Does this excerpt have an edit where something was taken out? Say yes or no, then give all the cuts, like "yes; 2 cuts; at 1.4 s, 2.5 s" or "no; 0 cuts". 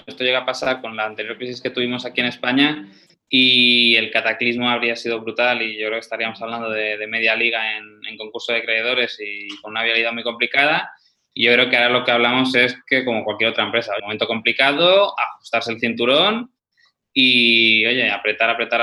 yes; 1 cut; at 14.0 s